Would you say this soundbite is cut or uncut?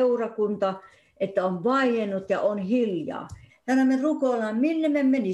cut